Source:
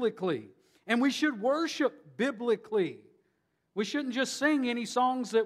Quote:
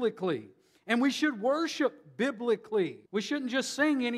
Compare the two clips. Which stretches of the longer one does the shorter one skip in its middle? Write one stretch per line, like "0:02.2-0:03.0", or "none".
0:03.1-0:03.7